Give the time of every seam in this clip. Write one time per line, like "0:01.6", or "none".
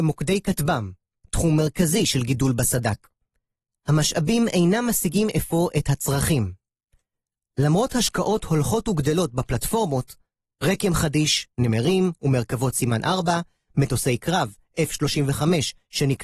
none